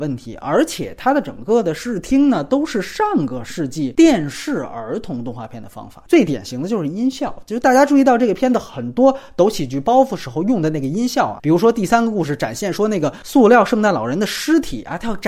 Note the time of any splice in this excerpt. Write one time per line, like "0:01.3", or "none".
none